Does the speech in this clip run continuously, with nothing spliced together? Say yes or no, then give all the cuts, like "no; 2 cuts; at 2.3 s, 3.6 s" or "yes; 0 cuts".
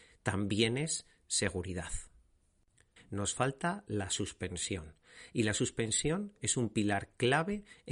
no; 1 cut; at 3.0 s